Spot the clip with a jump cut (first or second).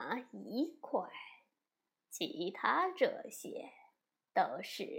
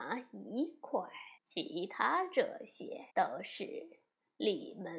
second